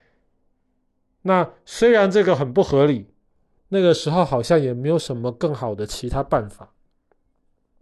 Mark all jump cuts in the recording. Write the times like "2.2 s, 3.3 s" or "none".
3.6 s